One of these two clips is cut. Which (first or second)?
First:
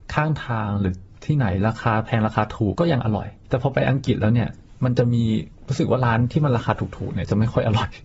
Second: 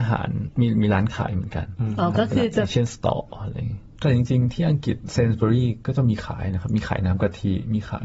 first